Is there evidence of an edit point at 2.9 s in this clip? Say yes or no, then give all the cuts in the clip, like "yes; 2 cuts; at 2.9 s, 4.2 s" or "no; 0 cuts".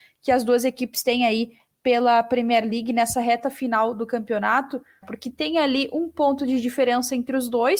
no; 1 cut; at 5.0 s